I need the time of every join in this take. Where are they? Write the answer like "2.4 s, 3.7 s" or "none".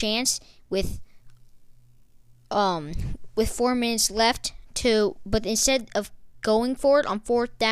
none